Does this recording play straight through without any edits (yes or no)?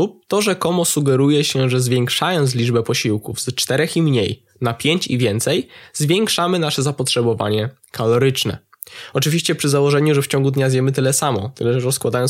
yes